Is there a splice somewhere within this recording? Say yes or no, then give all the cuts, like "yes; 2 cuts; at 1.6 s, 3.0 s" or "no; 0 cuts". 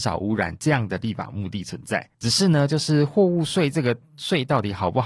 yes; 1 cut; at 2.1 s